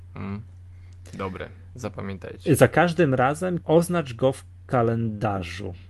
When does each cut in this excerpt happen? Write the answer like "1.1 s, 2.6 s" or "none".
3.6 s